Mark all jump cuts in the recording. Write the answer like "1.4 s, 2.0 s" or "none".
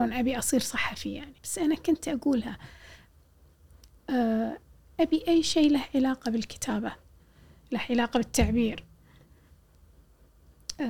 1.4 s